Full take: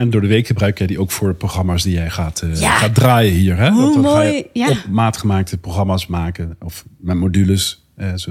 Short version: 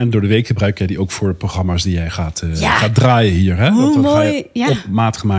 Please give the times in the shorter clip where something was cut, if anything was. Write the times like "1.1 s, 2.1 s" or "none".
none